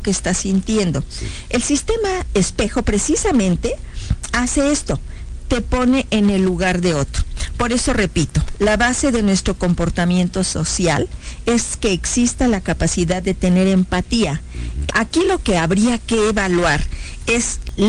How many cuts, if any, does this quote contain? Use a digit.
1